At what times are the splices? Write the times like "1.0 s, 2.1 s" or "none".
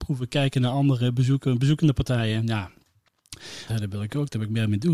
3.7 s

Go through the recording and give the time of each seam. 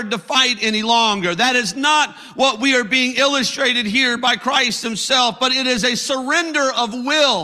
none

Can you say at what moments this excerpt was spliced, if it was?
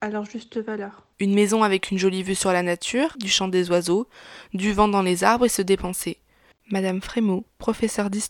1.1 s, 3.1 s, 6.5 s

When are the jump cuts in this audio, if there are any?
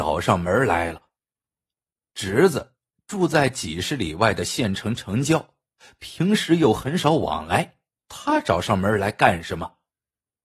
8.0 s

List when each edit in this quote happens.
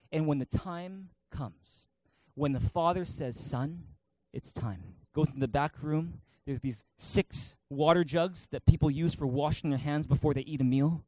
5.1 s, 7.6 s

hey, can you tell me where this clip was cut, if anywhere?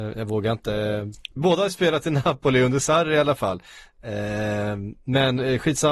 1.4 s

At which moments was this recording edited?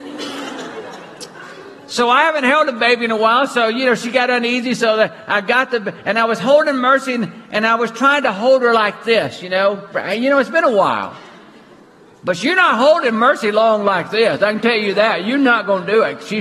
9.9 s

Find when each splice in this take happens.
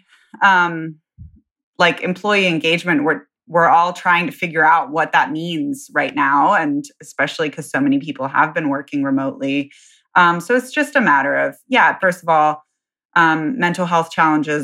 12.0 s

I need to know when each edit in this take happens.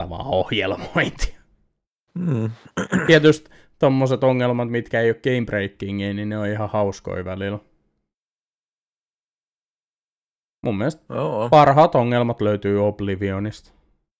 none

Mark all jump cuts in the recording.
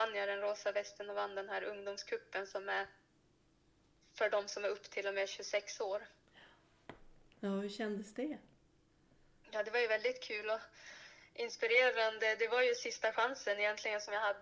none

